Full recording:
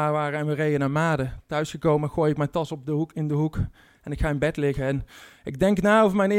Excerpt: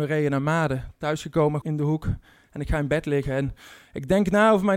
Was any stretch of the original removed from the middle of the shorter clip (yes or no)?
yes